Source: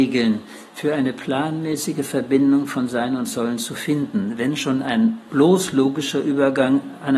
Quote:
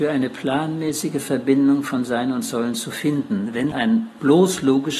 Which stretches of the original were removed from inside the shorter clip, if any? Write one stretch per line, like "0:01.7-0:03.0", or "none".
0:04.6-0:04.8